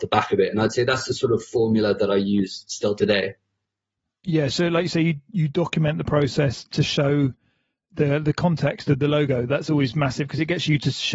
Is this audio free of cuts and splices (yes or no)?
yes